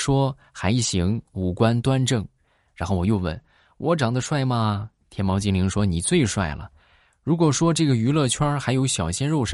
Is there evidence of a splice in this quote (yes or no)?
no